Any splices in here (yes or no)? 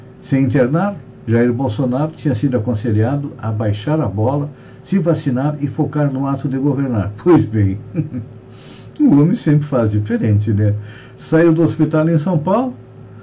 no